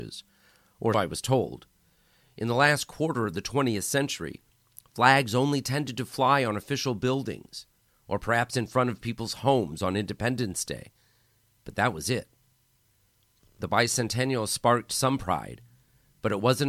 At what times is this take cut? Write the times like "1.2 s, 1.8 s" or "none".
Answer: 0.9 s